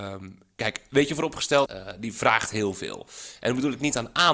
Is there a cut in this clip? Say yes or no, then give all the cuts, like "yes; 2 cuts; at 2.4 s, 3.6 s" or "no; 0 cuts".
yes; 1 cut; at 1.7 s